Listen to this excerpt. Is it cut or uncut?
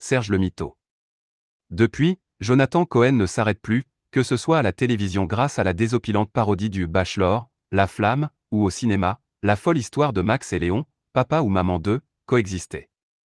uncut